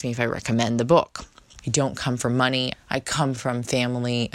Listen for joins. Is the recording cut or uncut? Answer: cut